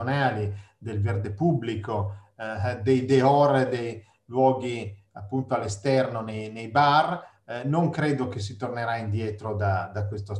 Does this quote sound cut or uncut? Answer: uncut